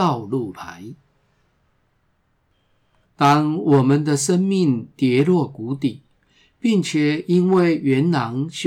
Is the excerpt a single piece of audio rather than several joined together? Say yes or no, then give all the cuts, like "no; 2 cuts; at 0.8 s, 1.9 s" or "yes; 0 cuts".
no; 1 cut; at 3.0 s